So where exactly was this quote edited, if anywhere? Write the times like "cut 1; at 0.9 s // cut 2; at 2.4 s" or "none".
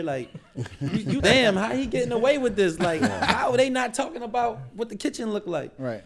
cut 1; at 1.2 s